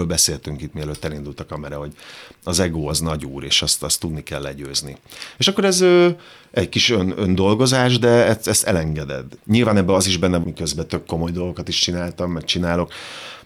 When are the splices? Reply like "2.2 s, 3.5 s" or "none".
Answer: 9.4 s, 10.4 s

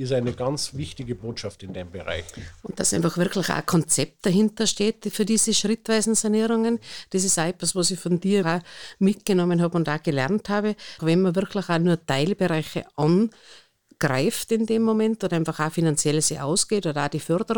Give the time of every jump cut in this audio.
8.4 s, 11.0 s

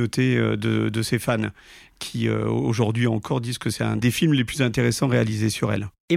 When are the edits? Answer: none

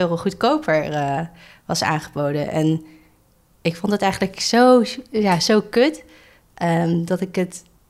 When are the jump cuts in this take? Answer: none

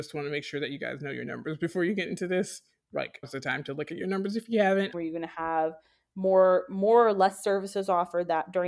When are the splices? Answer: 3.2 s, 4.9 s

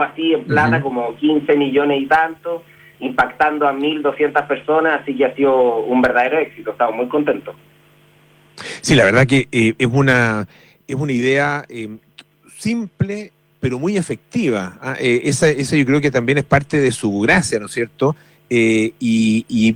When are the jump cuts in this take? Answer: none

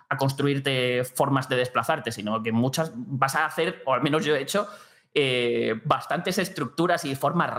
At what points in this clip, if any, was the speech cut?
none

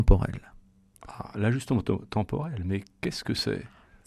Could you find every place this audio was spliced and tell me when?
none

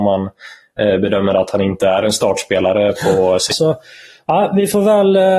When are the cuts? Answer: 3.5 s

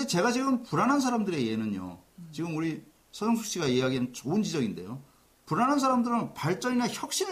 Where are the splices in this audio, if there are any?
none

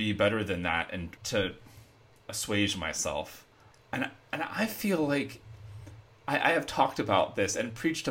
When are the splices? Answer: 1.2 s, 3.7 s

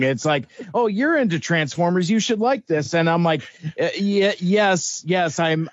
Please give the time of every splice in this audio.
none

